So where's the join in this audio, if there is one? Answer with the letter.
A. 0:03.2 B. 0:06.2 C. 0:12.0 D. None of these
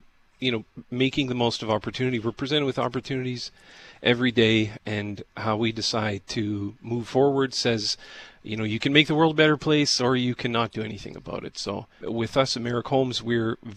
C